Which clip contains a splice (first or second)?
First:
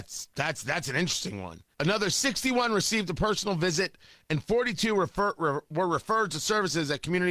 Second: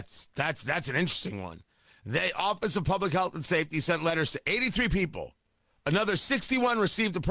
first